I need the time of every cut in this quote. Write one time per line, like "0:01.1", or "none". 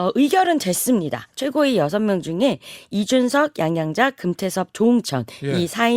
none